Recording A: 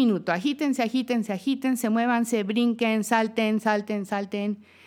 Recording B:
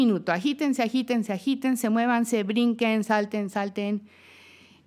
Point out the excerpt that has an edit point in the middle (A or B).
B